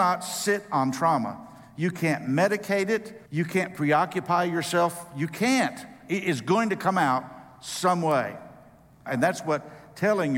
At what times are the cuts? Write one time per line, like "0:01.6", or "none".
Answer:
0:03.2
0:09.1